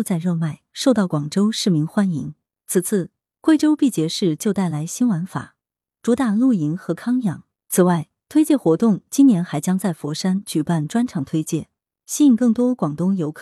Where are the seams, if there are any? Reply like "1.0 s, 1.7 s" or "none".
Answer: 7.5 s